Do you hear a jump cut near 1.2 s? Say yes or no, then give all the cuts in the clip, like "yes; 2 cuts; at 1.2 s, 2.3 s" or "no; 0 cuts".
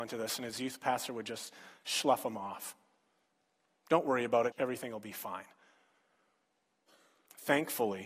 no; 1 cut; at 4.5 s